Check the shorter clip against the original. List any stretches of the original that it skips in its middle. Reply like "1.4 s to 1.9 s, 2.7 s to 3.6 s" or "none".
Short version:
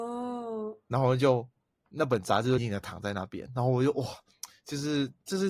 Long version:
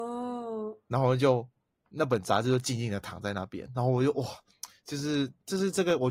2.6 s to 2.8 s